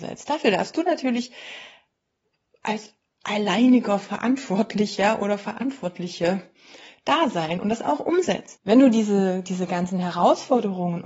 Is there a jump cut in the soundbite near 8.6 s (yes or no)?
yes